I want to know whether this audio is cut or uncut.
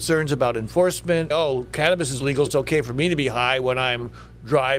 cut